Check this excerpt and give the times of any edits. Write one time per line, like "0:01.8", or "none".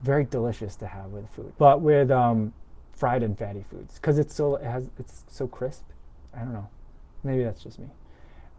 0:01.6